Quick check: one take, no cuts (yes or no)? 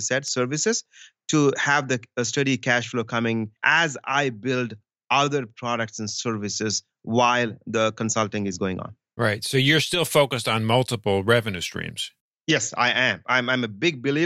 no